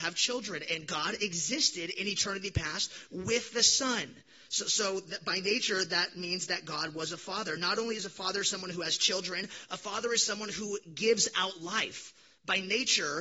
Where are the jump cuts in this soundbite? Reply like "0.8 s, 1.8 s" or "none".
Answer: none